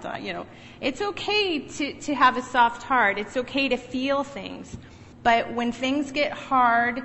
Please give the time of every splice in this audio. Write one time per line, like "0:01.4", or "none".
0:05.1